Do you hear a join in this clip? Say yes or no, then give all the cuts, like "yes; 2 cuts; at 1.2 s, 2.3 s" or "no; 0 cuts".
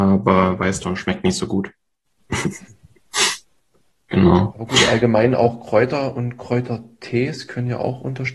no; 0 cuts